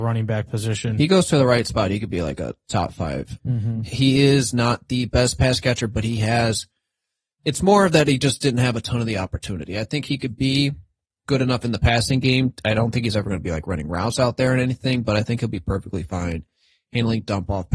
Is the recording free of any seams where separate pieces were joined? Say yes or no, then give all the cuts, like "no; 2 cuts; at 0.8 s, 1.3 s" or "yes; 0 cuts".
no; 1 cut; at 3.4 s